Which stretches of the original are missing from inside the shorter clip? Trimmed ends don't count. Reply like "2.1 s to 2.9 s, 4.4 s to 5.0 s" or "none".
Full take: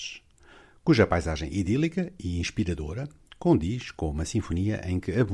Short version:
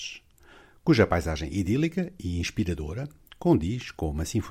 none